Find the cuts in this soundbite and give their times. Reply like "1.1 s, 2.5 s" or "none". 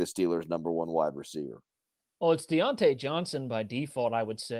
none